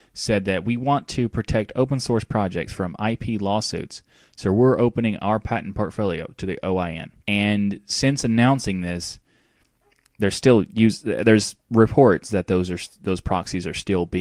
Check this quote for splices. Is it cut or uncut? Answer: cut